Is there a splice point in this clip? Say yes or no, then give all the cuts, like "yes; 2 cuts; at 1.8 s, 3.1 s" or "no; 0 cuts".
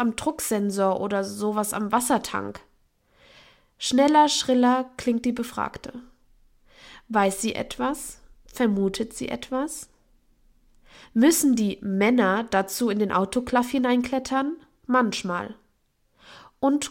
no; 0 cuts